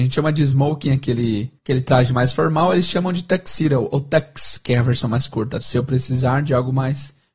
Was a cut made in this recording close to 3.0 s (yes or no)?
no